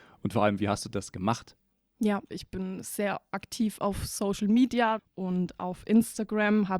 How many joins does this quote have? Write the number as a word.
two